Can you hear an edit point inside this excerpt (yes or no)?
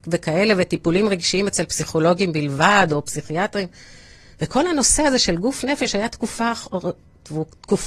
no